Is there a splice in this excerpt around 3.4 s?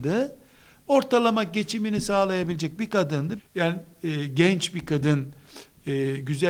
yes; 1 cut; at 3.4 s

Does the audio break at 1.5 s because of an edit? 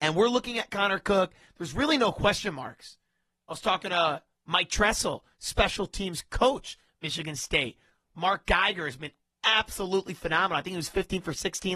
yes; 1 cut; at 1.5 s

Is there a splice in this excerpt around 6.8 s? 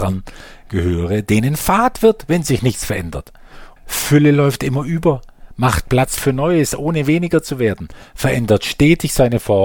no; 1 cut; at 3.8 s

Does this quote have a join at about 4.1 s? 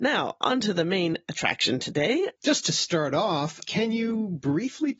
no; 1 cut; at 2.4 s

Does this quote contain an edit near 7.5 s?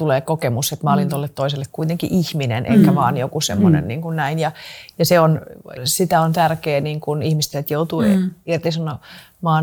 yes; 2 cuts; at 5.8 s, 7.5 s

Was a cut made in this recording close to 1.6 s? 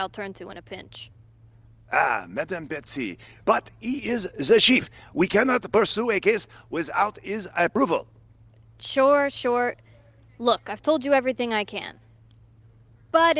no; 1 cut; at 3.4 s

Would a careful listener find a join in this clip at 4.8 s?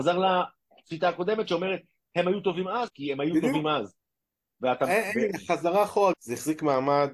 no; 2 cuts; at 2.9 s, 6.1 s

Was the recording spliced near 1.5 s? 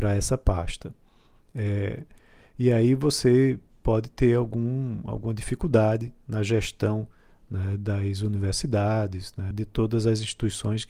no; 1 cut; at 9.5 s

